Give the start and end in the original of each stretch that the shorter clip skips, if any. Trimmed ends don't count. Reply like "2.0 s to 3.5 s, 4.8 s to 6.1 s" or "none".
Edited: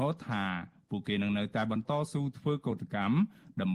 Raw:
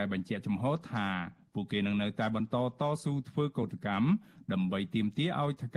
2.5 s to 2.8 s